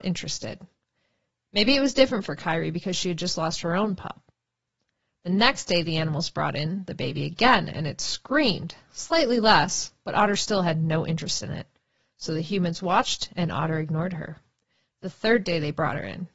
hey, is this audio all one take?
yes; 0 cuts

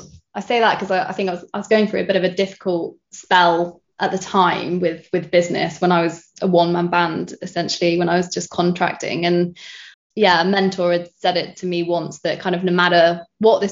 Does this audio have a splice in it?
no; 0 cuts

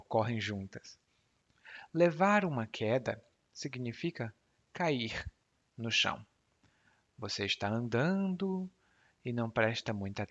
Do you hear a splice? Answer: no; 0 cuts

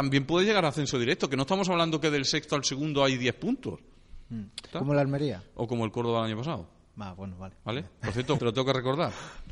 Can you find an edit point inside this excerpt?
yes; 2 cuts; at 4.7 s, 8.4 s

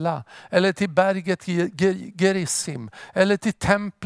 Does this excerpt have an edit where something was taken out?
no; 0 cuts

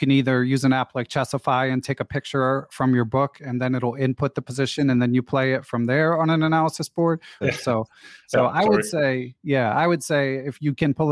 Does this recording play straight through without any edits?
no; 1 cut; at 7.4 s

